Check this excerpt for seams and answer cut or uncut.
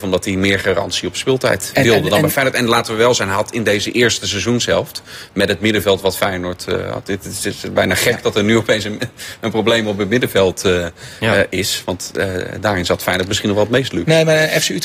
uncut